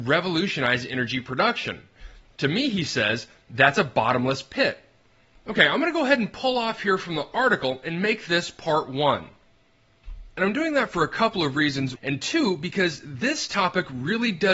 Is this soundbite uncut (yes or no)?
no